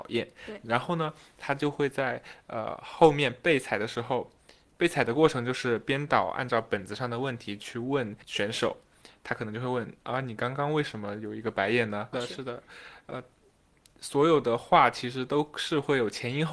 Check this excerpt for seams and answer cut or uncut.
cut